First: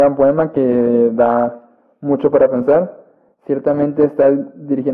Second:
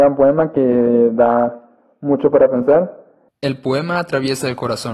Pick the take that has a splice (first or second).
second